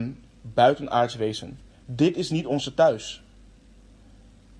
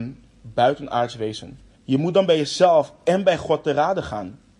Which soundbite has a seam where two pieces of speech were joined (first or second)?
second